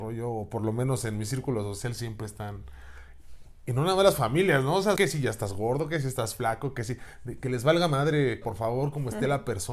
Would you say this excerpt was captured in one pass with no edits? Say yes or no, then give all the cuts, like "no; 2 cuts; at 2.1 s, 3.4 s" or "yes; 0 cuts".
no; 2 cuts; at 5.0 s, 8.4 s